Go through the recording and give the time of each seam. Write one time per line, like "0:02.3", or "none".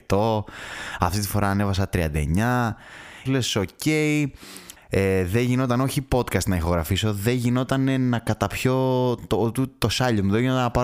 0:03.3
0:04.8